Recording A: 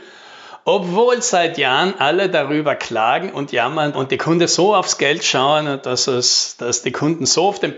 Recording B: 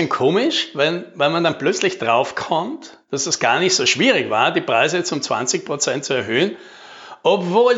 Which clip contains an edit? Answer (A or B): A